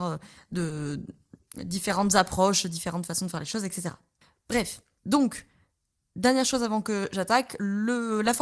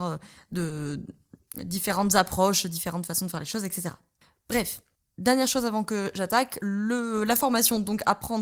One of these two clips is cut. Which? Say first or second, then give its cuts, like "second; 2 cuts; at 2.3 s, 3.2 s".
second; 1 cut; at 5.0 s